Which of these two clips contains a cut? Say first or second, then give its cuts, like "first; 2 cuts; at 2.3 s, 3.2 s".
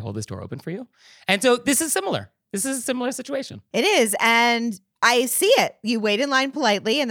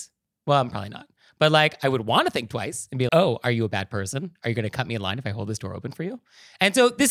second; 1 cut; at 3.1 s